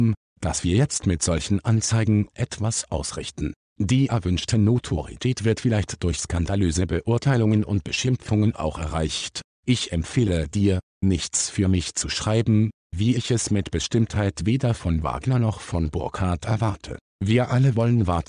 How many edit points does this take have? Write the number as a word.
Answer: zero